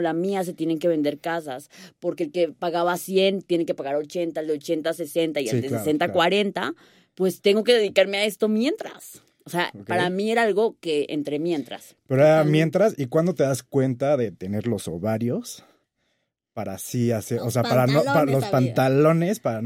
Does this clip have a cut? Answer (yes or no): no